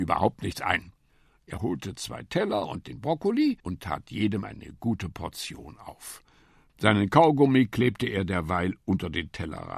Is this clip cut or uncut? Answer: cut